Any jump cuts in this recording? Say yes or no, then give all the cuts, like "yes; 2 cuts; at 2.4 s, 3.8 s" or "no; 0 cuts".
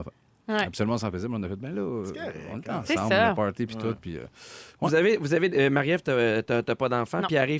no; 0 cuts